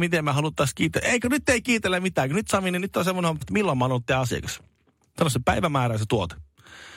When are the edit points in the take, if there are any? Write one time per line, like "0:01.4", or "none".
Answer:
0:03.4